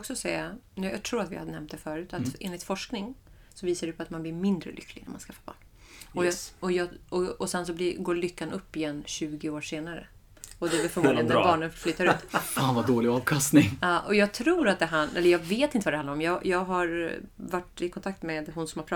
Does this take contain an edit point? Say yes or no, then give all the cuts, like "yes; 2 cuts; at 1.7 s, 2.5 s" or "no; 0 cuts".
no; 0 cuts